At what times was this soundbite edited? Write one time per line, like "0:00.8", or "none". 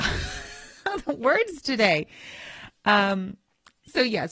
none